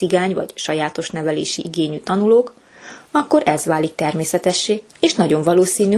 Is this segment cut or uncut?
cut